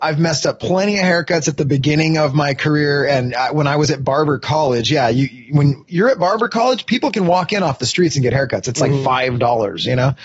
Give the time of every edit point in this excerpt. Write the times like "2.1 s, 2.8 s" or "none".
none